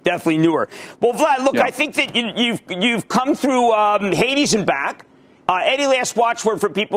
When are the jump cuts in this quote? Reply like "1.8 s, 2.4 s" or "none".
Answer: 5.4 s